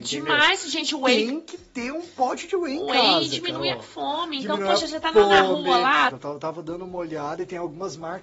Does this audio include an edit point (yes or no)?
yes